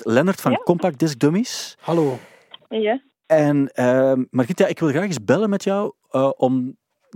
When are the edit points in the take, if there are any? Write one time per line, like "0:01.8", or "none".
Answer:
none

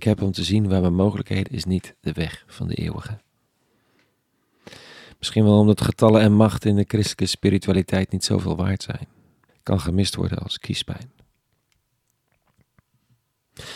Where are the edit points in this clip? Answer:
0:01.5
0:09.5

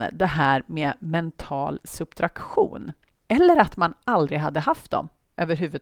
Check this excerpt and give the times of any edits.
0:03.3

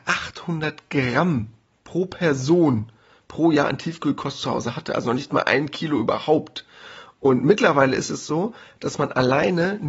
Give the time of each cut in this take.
none

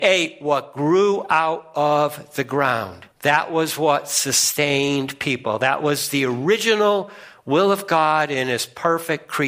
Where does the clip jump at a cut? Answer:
0:03.1

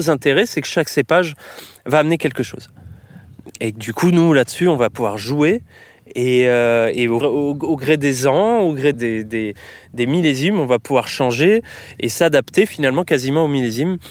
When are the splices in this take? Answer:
0:07.2
0:08.9

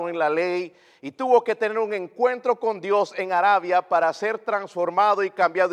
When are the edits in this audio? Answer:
none

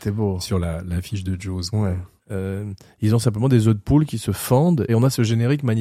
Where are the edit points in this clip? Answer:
0:02.2
0:04.9

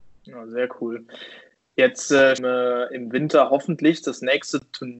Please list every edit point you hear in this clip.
0:02.4

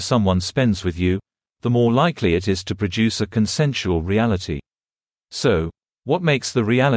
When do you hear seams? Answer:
none

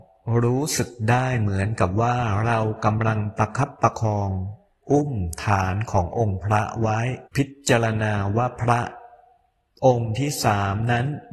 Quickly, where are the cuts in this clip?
0:07.3

